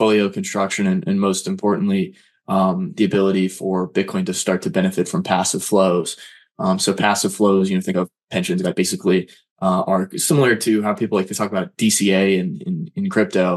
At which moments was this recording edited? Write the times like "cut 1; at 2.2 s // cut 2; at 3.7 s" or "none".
cut 1; at 8.6 s